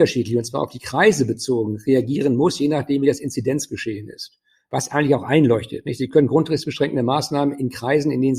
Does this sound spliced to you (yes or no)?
no